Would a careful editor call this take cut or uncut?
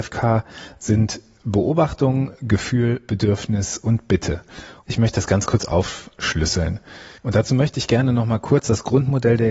cut